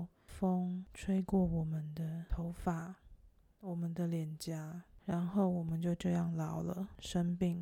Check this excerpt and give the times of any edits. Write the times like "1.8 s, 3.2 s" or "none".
none